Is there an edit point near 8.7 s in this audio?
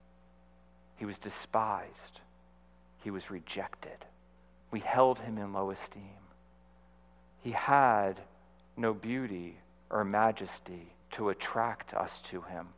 no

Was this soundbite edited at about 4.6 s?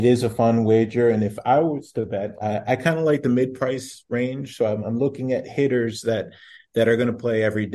no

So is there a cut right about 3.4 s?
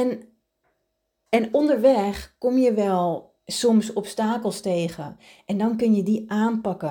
yes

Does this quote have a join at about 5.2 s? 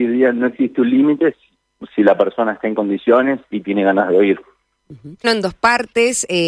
yes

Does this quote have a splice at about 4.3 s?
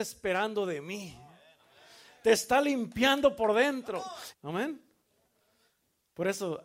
yes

